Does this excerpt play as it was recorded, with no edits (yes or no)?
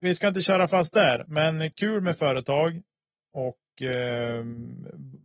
yes